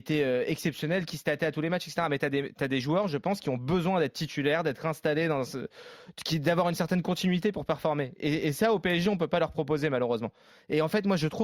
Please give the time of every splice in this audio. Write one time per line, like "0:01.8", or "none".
none